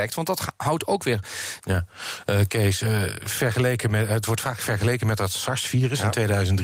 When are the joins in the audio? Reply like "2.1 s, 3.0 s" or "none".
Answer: 1.6 s